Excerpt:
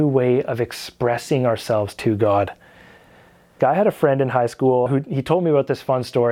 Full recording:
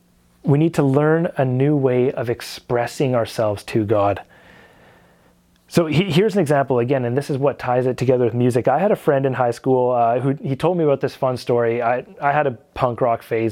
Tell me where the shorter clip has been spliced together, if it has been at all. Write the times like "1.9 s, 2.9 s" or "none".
3.6 s, 4.9 s